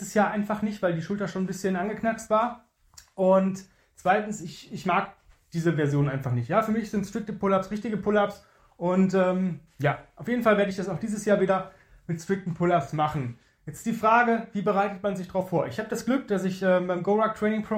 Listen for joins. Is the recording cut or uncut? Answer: uncut